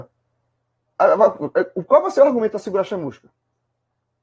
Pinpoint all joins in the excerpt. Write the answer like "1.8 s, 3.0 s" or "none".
1.0 s